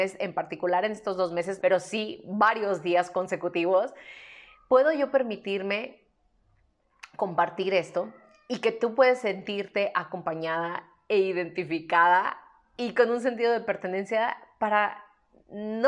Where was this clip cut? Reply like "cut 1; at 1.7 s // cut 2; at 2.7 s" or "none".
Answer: cut 1; at 1.6 s